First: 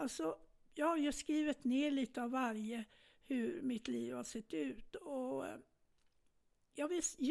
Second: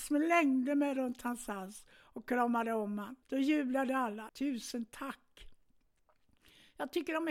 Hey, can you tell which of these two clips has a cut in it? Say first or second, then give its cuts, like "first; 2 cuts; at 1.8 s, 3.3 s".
second; 2 cuts; at 3.2 s, 4.3 s